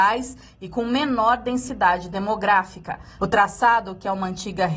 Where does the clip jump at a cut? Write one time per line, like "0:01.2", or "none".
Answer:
0:03.2